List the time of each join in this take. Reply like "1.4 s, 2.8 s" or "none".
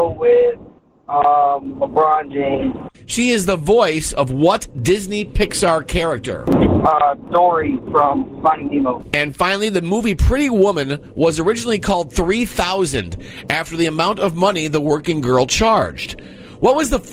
2.9 s